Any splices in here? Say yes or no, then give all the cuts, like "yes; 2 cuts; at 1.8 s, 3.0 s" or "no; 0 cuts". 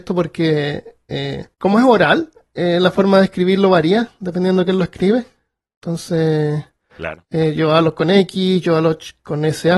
yes; 1 cut; at 1.5 s